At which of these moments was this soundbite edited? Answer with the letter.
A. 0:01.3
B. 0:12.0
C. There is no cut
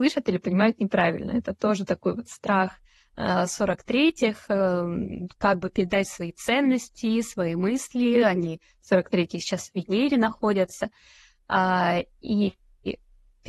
C